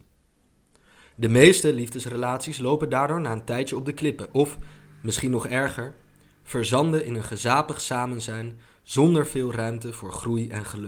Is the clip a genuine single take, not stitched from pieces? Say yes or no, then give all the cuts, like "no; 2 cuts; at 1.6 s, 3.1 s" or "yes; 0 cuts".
yes; 0 cuts